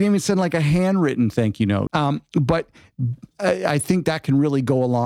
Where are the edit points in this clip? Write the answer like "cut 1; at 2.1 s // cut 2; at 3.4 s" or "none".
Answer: cut 1; at 1.9 s